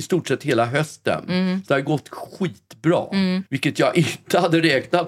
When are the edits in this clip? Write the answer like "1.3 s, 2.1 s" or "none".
3.5 s